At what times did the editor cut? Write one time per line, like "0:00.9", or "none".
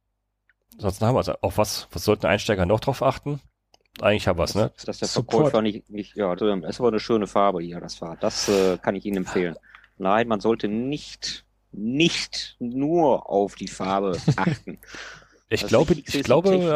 0:04.7
0:06.4